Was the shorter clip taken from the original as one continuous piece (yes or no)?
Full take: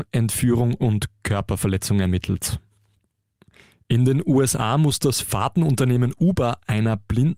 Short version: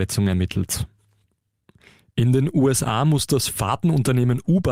yes